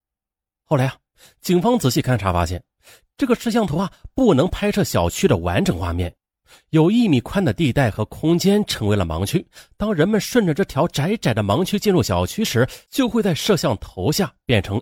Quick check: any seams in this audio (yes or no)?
no